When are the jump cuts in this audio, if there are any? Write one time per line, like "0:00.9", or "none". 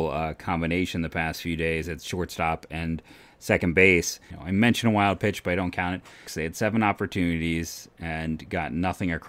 0:04.3
0:06.3